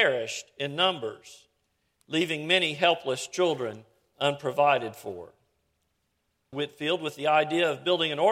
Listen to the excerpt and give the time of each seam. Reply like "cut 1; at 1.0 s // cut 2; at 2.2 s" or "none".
cut 1; at 6.5 s